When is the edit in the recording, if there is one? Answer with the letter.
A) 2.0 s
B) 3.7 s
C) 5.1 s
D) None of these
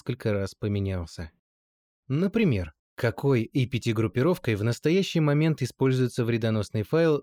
A